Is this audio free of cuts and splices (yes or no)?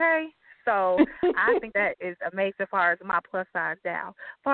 no